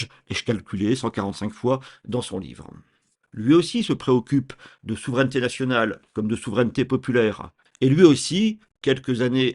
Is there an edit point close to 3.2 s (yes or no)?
yes